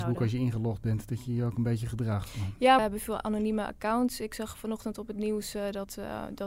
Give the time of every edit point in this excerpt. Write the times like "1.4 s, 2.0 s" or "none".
2.8 s